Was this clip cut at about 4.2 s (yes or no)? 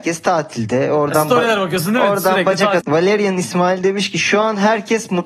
no